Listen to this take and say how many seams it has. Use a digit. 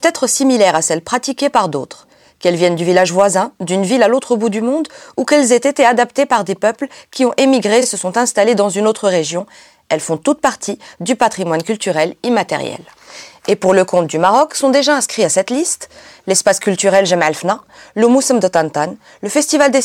0